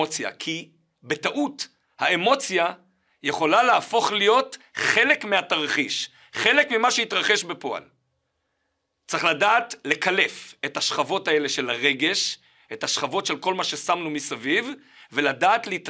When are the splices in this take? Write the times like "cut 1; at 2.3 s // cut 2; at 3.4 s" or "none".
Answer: none